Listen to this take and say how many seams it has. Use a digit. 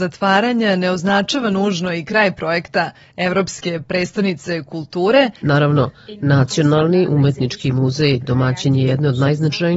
1